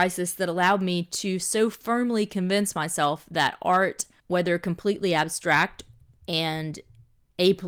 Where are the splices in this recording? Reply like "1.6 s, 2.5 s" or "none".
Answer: 4.2 s